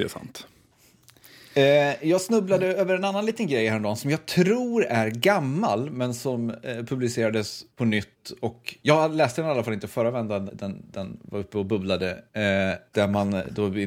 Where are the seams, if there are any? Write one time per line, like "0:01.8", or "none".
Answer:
0:10.5
0:12.9